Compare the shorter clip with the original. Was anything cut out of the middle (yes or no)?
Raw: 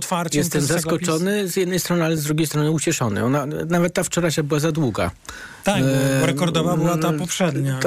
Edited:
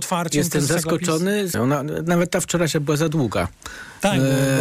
yes